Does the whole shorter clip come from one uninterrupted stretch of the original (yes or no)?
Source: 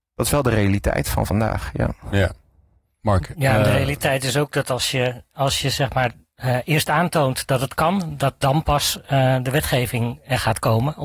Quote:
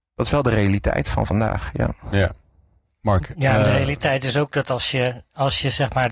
yes